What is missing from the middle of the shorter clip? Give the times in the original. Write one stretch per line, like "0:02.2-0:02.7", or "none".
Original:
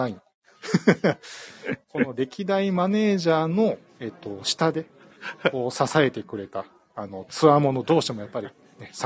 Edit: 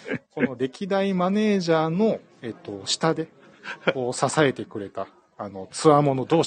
none